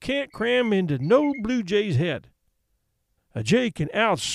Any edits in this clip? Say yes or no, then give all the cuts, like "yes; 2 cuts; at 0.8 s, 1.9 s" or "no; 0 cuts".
yes; 1 cut; at 3.2 s